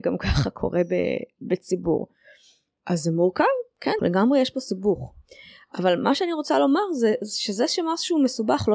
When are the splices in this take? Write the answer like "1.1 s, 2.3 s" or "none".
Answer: 4.0 s